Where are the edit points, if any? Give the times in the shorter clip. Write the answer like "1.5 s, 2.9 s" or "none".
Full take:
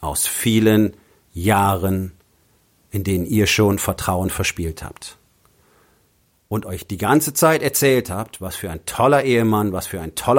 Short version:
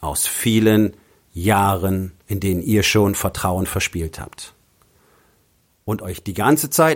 2.2 s